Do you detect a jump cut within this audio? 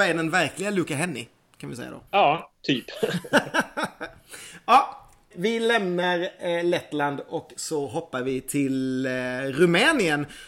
yes; 2 cuts; at 2.1 s, 5.3 s

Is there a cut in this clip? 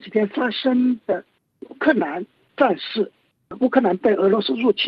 no; 0 cuts

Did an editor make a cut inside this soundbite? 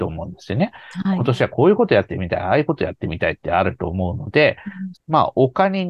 yes; 1 cut; at 4.9 s

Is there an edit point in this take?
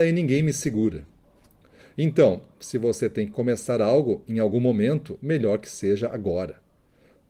yes; 1 cut; at 1.8 s

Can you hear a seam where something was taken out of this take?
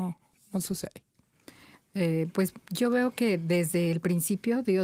no; 0 cuts

